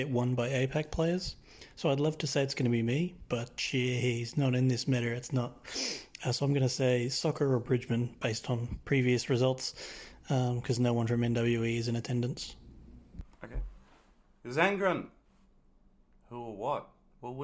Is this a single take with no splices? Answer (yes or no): yes